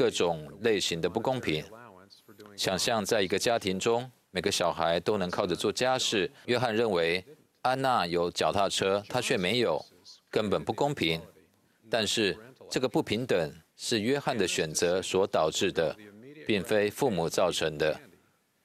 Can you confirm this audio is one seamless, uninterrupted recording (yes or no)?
no